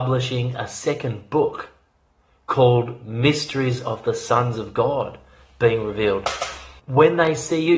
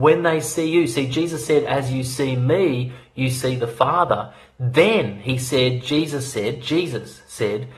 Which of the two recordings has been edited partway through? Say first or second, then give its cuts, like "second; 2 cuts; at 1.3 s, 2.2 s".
first; 1 cut; at 6.8 s